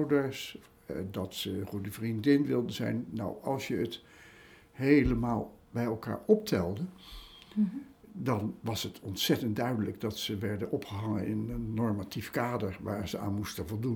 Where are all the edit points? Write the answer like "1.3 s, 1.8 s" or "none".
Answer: none

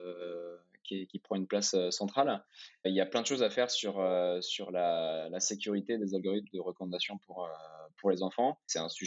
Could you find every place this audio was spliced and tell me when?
none

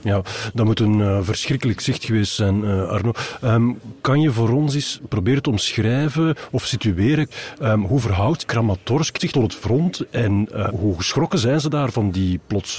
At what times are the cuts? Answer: 10.7 s

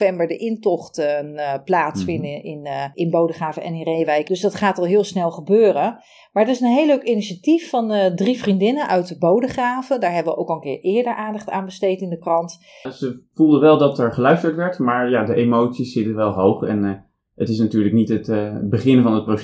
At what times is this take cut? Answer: 12.9 s

